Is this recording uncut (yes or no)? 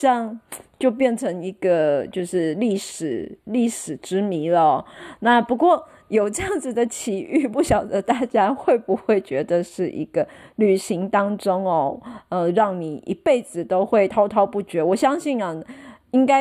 yes